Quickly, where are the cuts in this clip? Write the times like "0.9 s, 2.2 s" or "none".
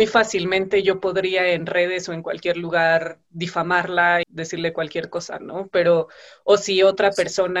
4.2 s